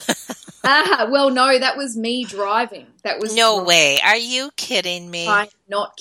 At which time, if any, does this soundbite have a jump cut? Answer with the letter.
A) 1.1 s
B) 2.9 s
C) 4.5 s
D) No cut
D